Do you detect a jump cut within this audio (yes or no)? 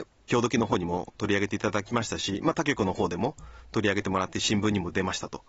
no